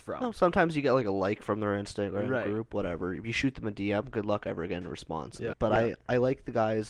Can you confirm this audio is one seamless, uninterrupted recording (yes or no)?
no